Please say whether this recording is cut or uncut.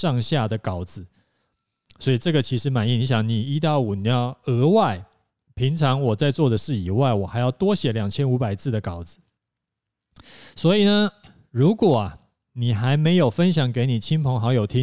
uncut